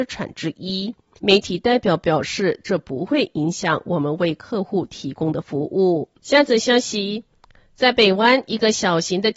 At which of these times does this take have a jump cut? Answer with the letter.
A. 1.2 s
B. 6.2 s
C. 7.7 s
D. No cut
B